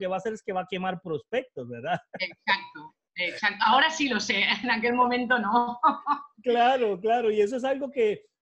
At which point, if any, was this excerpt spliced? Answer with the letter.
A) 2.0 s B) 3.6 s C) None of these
C